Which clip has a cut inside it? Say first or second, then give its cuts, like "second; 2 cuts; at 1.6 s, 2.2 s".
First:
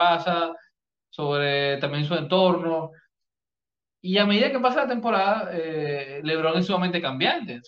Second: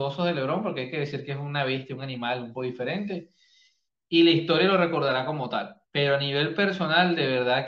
second; 1 cut; at 2.5 s